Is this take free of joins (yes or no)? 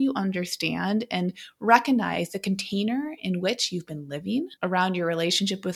no